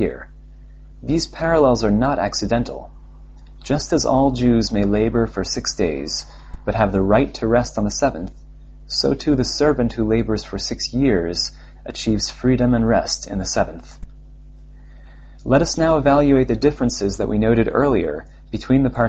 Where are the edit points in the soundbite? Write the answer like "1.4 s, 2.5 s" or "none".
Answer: none